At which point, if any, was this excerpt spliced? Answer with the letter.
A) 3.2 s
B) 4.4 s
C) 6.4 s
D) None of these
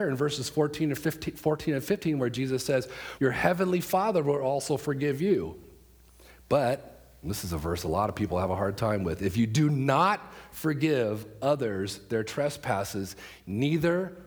A